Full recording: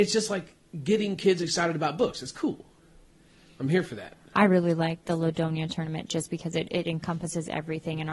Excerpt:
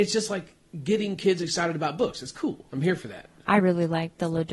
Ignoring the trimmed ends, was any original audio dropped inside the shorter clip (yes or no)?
yes